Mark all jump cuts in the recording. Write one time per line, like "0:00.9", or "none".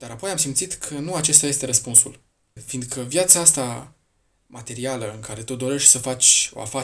0:02.6